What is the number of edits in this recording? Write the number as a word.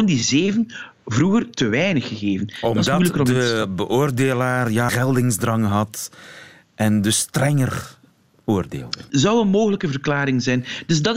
one